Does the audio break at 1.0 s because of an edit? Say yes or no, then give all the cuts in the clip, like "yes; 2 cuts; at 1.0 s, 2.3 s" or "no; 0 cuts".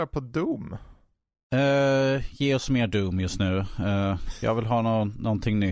no; 0 cuts